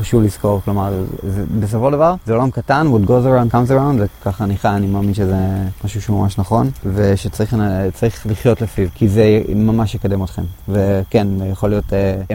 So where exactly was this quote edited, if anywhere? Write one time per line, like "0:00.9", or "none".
0:01.1